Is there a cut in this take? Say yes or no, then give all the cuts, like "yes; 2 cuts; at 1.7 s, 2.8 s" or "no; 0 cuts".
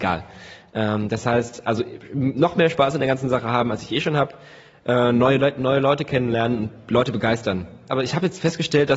yes; 1 cut; at 7.9 s